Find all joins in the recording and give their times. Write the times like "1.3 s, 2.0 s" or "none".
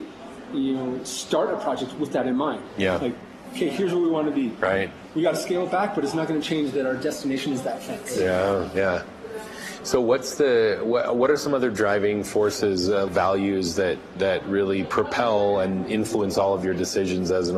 13.1 s